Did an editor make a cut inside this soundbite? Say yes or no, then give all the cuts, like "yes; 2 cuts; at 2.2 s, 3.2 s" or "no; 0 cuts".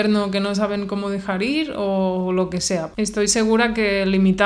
yes; 1 cut; at 2.9 s